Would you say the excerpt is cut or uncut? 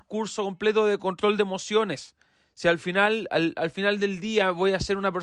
uncut